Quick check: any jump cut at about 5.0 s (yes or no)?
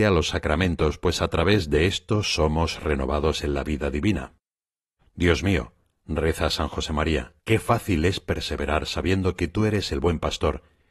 yes